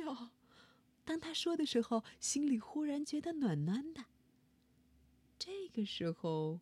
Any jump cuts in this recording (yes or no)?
yes